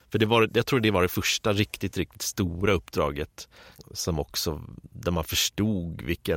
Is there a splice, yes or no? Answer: no